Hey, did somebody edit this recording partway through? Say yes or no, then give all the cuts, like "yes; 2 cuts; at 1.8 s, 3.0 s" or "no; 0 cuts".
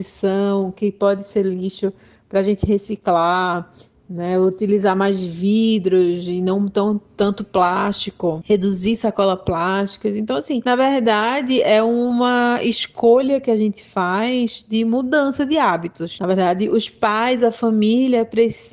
no; 0 cuts